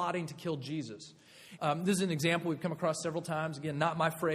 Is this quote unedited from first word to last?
no; 1 cut; at 1.6 s

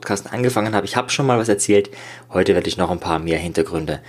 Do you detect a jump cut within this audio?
no; 0 cuts

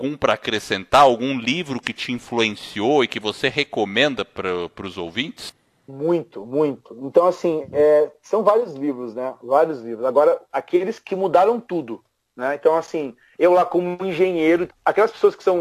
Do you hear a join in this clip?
yes; 1 cut; at 14.7 s

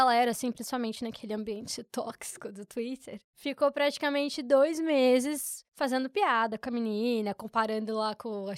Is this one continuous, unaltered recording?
yes; 0 cuts

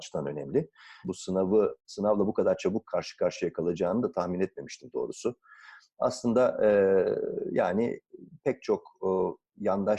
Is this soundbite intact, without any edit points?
no; 1 cut; at 1.0 s

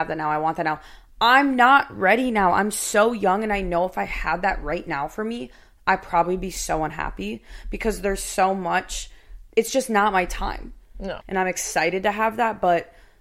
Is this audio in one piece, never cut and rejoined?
no; 2 cuts; at 9.5 s, 11.2 s

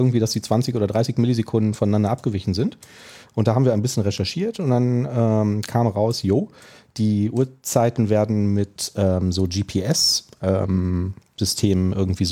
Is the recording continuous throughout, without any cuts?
yes; 0 cuts

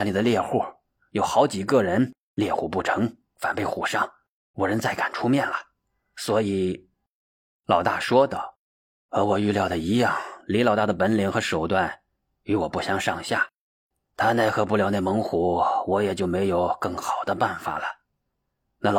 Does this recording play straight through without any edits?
yes; 0 cuts

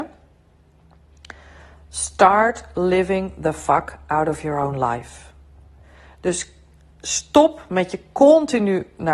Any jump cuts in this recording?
no; 0 cuts

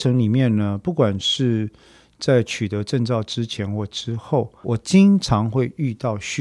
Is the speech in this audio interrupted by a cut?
yes; 1 cut; at 4.6 s

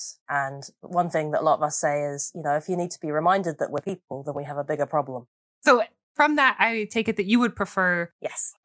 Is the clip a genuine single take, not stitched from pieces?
yes; 0 cuts

